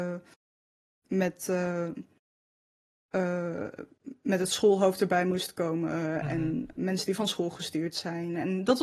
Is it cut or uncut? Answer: cut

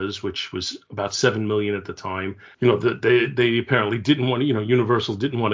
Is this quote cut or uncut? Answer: cut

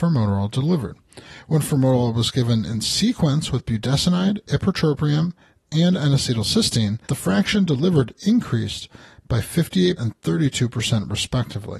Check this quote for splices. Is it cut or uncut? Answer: cut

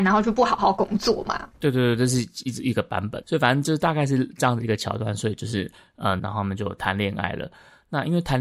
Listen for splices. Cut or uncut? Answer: cut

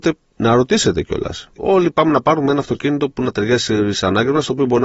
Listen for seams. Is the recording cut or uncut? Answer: cut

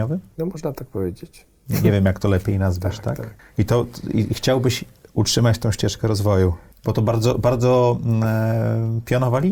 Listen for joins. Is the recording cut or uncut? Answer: uncut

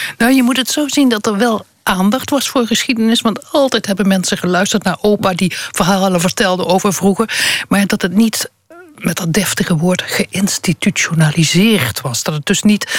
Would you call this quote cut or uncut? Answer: uncut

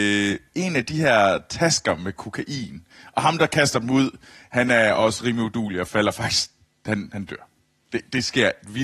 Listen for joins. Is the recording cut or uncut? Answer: uncut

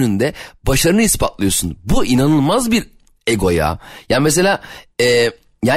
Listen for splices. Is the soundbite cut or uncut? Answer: uncut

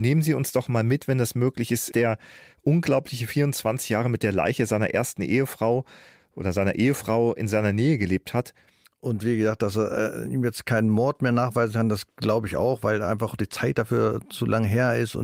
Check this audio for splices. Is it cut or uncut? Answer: cut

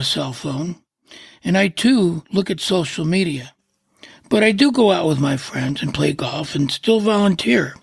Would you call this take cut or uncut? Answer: uncut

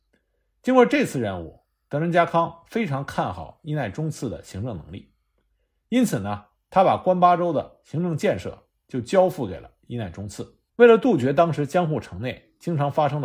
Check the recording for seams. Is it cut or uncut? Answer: cut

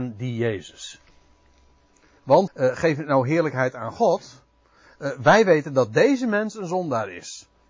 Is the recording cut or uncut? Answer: cut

